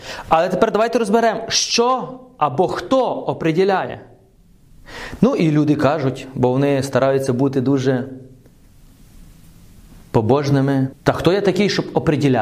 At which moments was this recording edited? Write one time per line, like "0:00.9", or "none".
0:05.2
0:10.9